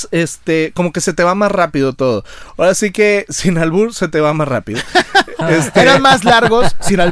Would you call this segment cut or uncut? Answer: uncut